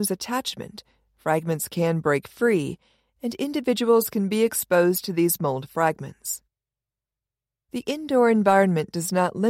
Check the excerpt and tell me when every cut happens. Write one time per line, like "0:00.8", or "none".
none